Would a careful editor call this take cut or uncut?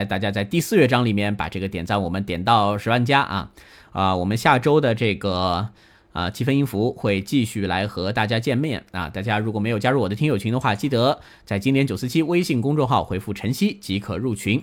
uncut